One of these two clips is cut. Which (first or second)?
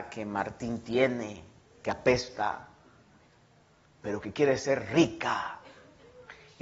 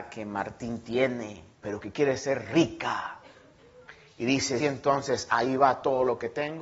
second